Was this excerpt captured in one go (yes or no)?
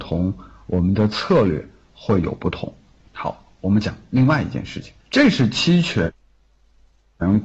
no